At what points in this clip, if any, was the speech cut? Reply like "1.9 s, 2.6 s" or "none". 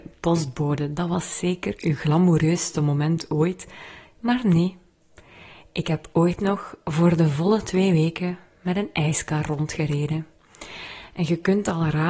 none